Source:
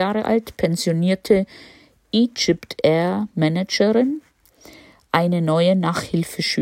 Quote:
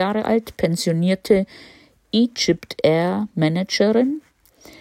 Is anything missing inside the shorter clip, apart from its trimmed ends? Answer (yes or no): no